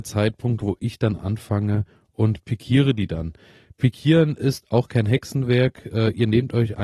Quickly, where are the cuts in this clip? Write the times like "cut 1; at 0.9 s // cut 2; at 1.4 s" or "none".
none